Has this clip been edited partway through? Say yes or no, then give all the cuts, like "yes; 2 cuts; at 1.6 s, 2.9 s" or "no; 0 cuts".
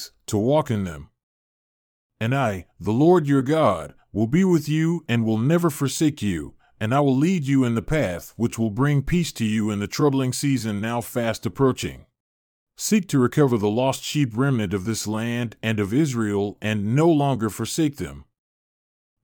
yes; 1 cut; at 12.7 s